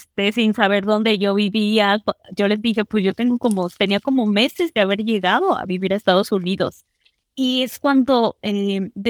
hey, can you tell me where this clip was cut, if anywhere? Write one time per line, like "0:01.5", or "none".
0:07.2